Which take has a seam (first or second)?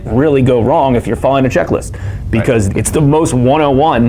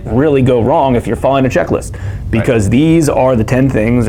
first